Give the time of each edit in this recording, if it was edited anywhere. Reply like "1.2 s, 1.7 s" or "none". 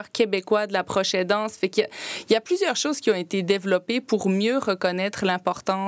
none